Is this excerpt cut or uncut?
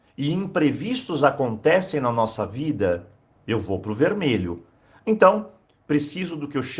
cut